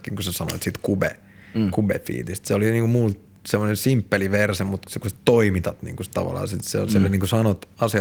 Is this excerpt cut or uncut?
uncut